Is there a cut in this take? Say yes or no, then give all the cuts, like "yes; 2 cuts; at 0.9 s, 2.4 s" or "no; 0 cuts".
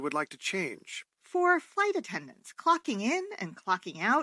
yes; 1 cut; at 1.1 s